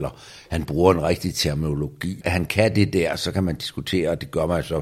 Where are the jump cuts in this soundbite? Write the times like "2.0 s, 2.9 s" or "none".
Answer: 2.2 s